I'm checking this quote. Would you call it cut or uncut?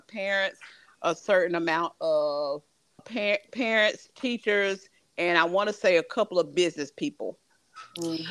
cut